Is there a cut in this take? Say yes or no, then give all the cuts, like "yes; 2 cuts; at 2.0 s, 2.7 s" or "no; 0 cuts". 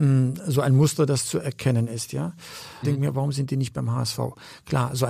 yes; 1 cut; at 2.8 s